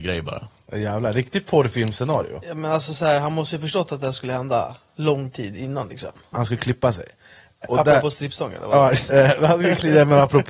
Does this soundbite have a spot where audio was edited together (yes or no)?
yes